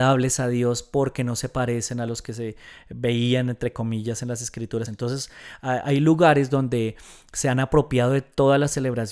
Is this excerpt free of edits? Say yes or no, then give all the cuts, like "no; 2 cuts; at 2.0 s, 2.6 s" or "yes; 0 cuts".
no; 1 cut; at 4.9 s